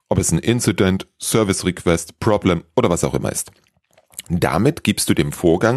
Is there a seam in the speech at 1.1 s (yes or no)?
no